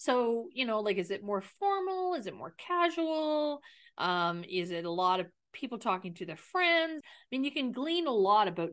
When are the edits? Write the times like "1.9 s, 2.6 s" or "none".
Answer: 7.0 s